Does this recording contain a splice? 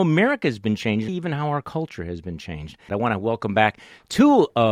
yes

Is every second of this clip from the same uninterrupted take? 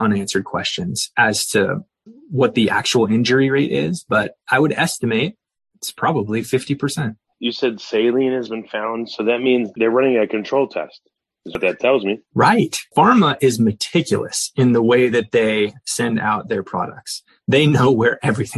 no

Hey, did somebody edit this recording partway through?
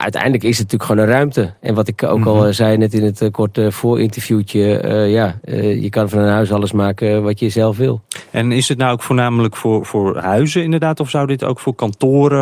no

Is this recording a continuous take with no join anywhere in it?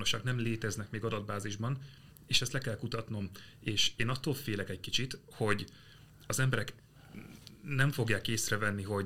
yes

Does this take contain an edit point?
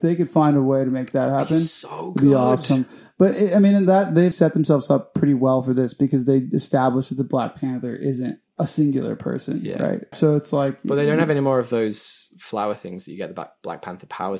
yes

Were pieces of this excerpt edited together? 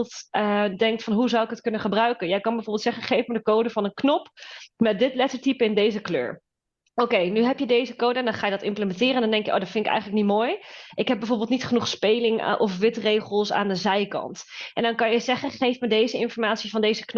no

